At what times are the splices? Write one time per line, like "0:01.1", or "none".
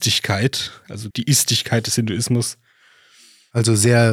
0:01.1

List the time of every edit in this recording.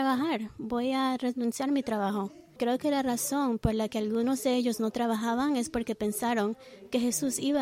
0:02.6

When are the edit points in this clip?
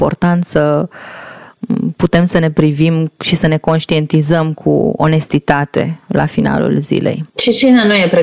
0:07.3

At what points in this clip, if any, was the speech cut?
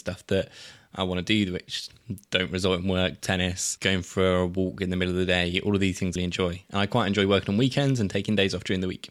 0:03.2
0:06.2

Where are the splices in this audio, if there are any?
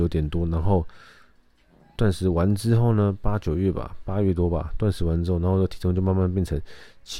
none

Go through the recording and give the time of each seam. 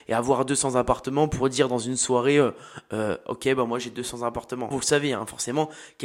0:04.7

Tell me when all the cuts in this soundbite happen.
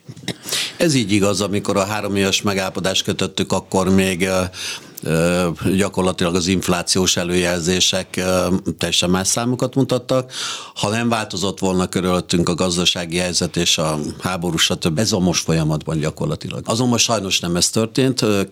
0:14.9
0:16.6

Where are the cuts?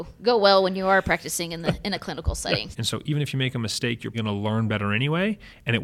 0:02.7
0:04.1

